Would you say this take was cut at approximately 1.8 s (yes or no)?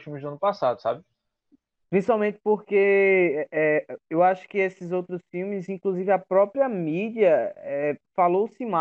yes